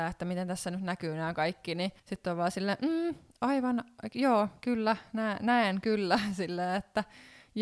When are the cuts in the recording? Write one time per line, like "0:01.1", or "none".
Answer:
0:02.0